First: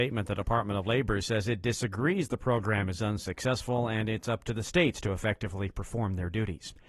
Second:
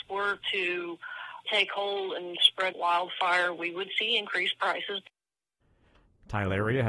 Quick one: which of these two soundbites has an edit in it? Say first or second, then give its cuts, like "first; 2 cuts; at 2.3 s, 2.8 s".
second; 2 cuts; at 1.5 s, 2.7 s